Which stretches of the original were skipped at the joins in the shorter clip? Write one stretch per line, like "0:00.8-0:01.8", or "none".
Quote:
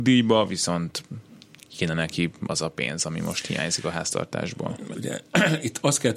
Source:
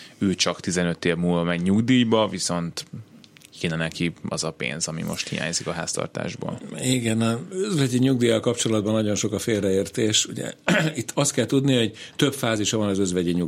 0:06.8-0:10.3